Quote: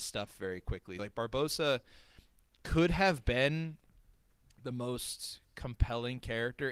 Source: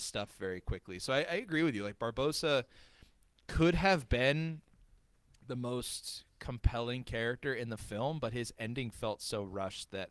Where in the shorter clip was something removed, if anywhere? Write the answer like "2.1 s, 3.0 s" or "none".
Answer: 1.0 s